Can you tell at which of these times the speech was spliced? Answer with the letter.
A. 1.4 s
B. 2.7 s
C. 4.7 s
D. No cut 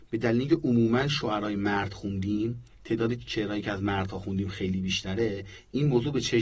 B